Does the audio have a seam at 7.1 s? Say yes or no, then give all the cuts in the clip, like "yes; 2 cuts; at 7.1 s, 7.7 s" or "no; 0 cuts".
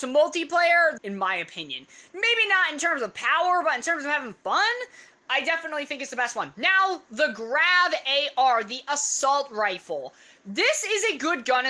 no; 1 cut; at 1.0 s